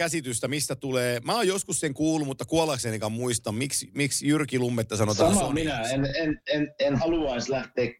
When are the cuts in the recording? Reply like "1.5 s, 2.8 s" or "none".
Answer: none